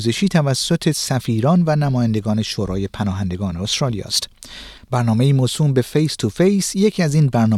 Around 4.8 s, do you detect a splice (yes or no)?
yes